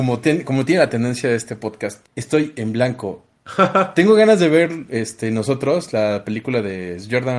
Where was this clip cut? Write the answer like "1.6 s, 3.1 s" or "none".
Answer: 2.1 s